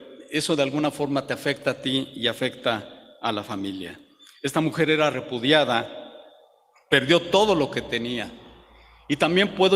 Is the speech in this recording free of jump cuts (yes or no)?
yes